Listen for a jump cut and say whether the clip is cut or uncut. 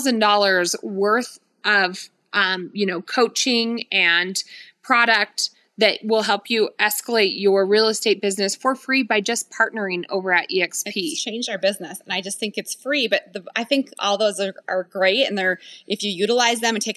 uncut